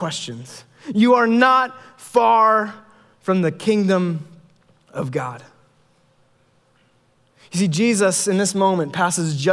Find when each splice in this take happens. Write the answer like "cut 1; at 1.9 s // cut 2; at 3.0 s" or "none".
none